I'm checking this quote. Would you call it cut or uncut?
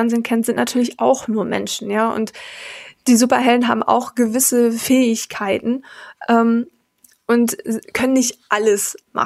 uncut